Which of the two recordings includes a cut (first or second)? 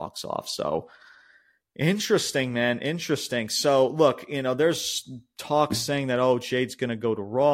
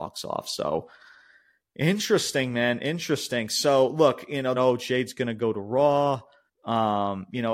second